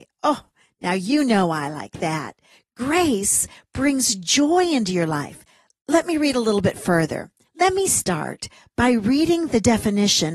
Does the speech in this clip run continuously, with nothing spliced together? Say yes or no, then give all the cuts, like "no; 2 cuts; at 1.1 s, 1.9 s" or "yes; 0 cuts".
no; 1 cut; at 7.5 s